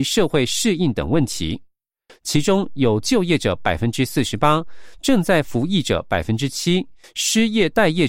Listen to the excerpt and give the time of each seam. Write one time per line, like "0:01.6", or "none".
0:02.1
0:07.0